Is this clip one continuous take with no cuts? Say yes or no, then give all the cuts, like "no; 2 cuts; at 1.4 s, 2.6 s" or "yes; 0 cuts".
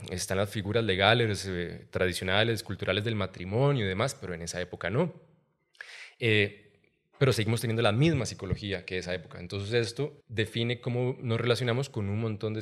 no; 1 cut; at 10.2 s